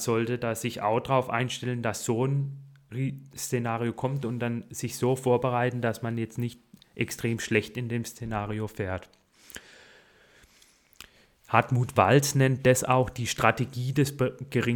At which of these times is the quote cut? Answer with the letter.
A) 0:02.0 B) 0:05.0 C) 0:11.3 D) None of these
D